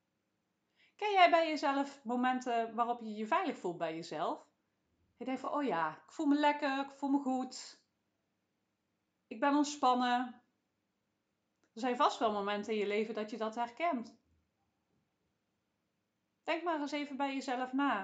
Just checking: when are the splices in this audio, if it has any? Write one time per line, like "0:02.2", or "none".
none